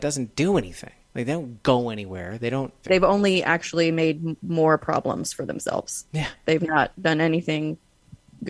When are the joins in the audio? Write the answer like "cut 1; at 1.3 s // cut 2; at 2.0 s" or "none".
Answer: cut 1; at 2.8 s